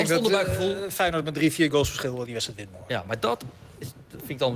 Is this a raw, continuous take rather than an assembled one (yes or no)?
yes